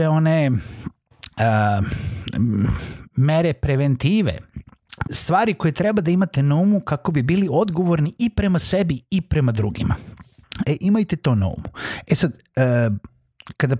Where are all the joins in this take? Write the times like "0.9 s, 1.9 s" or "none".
5.0 s